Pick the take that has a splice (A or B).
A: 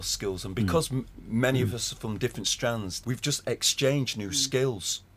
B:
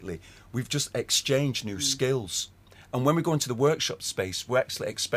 A